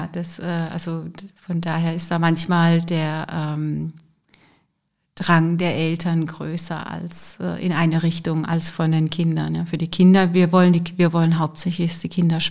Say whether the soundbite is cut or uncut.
uncut